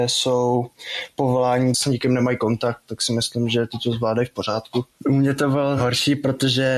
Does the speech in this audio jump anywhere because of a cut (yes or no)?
yes